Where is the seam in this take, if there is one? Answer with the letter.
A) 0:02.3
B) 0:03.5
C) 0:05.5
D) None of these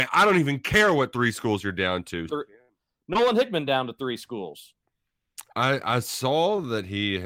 A